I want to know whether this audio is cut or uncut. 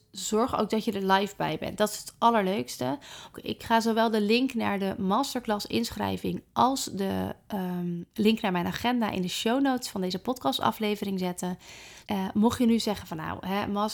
cut